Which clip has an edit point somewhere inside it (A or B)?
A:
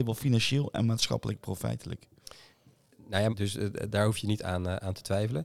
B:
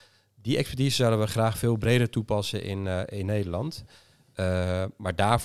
A